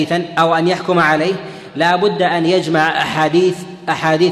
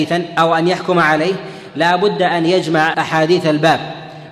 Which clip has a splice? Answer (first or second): second